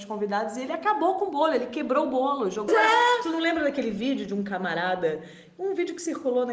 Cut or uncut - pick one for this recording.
cut